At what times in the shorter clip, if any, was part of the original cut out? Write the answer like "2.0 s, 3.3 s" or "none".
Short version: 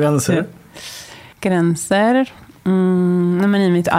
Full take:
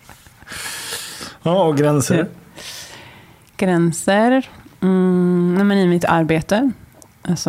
1.3 s